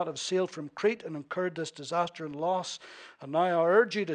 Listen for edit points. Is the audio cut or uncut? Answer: uncut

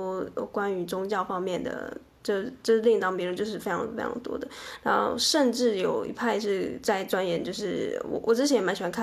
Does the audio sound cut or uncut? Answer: uncut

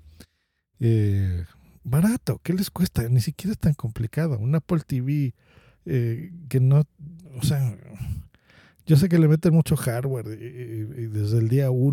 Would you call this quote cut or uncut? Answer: cut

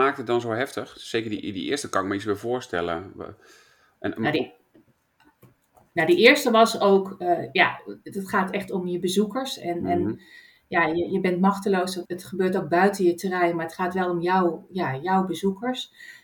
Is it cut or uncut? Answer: cut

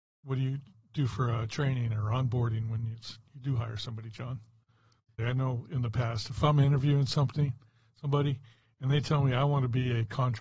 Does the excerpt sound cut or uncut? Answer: cut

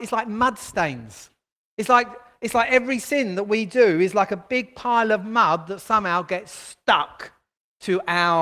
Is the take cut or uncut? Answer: uncut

